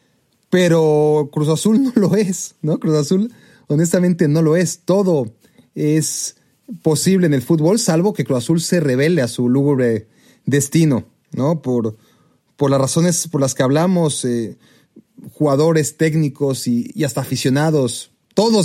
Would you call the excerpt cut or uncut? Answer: uncut